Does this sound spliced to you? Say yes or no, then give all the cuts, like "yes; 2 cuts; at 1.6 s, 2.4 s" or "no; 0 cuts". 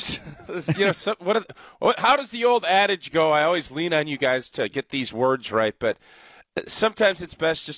no; 0 cuts